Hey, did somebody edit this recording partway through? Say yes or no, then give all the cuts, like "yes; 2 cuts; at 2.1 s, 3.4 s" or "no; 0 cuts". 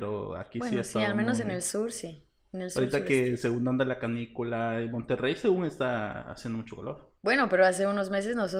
yes; 1 cut; at 7.2 s